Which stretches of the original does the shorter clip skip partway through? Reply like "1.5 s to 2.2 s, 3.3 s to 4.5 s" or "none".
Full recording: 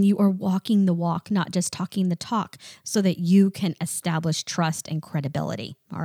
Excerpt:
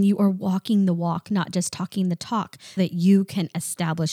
2.8 s to 3.0 s